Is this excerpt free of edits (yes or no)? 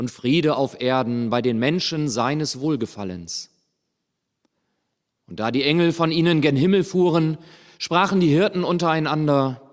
yes